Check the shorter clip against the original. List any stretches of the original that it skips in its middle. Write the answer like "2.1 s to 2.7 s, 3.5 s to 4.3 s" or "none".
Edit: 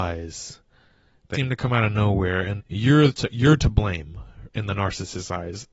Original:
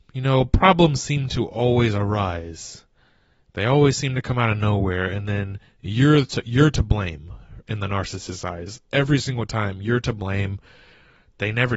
3.6 s to 4.0 s, 5.2 s to 5.7 s